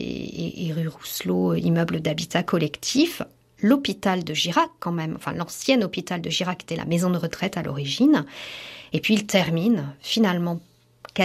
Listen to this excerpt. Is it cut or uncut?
uncut